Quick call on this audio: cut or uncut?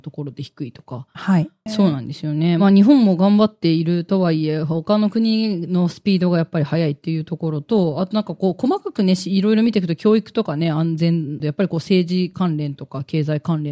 cut